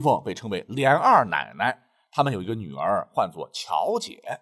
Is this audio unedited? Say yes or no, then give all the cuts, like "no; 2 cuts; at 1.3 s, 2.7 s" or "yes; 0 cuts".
yes; 0 cuts